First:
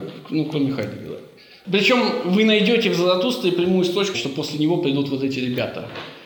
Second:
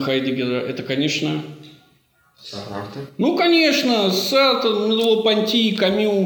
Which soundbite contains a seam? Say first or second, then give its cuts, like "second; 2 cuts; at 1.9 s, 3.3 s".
first; 1 cut; at 4.1 s